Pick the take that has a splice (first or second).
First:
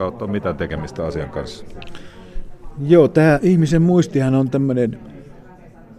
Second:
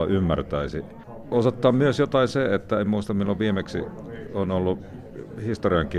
first